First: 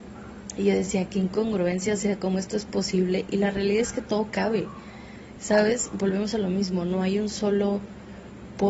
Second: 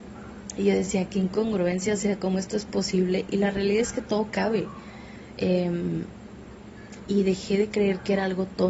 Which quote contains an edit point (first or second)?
second